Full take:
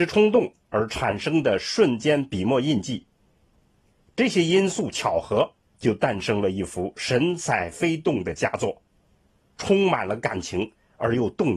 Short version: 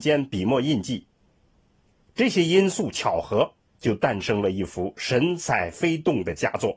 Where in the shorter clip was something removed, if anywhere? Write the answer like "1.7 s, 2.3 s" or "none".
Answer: none